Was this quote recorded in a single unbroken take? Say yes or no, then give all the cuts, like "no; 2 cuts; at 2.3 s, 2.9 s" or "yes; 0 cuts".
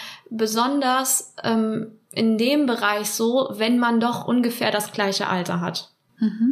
yes; 0 cuts